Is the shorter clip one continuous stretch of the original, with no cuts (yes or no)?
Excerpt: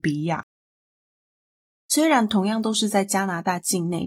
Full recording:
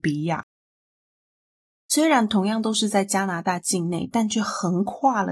yes